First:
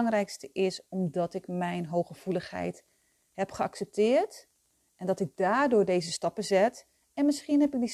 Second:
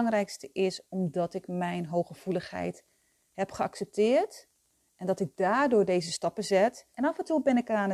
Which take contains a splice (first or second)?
second